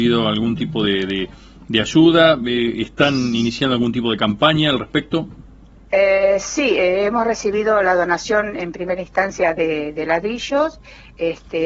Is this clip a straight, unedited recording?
yes; 0 cuts

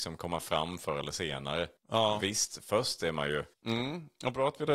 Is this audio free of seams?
no; 2 cuts; at 1.8 s, 3.5 s

